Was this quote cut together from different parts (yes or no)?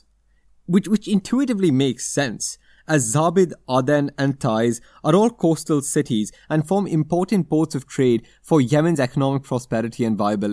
no